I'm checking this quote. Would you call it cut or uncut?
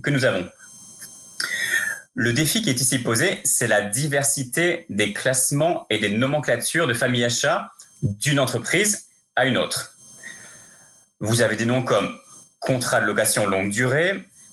uncut